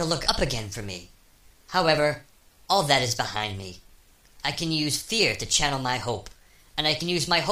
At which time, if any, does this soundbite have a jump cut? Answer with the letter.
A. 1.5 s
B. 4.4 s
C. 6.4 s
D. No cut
A